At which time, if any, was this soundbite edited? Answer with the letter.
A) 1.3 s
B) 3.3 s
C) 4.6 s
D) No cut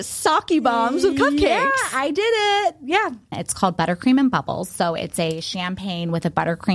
B